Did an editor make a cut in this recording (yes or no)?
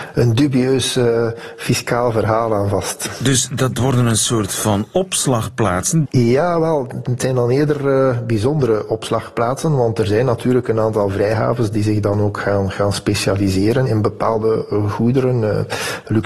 yes